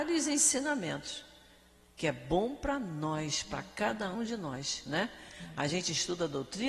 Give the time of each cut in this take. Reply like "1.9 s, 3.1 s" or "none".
4.1 s